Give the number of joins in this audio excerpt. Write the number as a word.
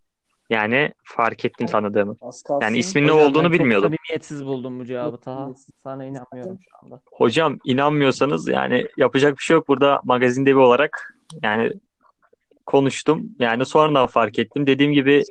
two